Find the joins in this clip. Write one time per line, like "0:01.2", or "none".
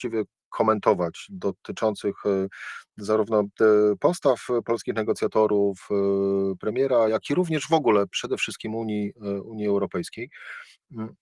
none

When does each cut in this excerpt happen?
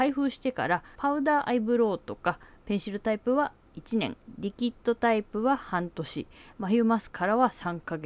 0:01.0

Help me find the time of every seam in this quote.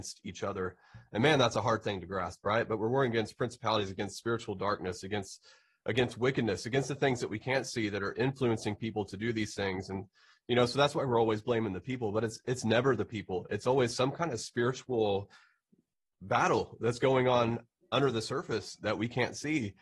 none

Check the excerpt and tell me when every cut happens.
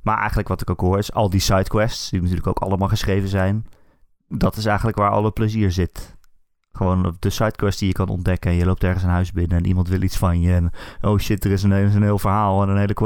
none

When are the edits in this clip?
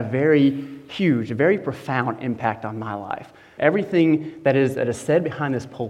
0:03.6

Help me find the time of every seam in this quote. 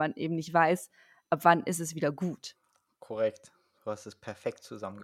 none

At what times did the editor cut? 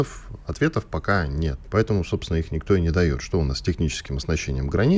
0:01.6

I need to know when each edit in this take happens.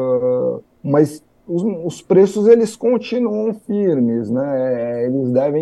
none

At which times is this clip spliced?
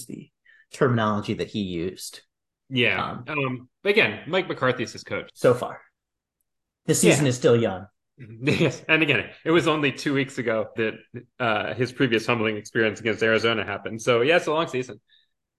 0:05.3
0:10.8

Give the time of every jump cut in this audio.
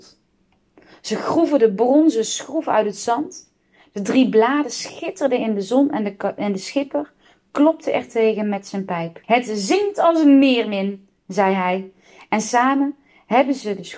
0:09.2

